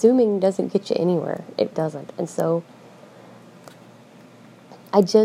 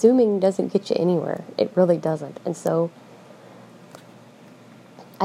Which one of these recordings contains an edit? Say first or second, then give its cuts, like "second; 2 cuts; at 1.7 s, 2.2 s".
first; 1 cut; at 1.7 s